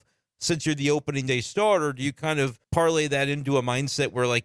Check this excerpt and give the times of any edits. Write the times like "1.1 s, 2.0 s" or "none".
2.6 s